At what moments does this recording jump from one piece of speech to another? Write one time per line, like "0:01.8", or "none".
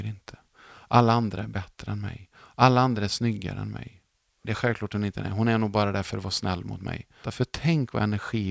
0:04.4
0:07.2